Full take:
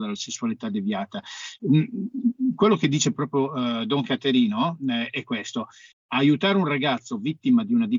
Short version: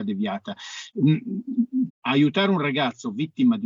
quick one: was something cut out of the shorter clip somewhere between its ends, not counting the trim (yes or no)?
yes